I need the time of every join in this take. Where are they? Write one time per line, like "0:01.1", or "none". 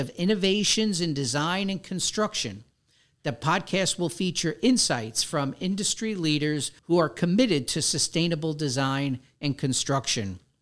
0:06.8